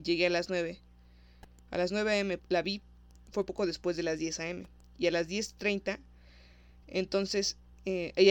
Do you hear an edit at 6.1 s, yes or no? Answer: no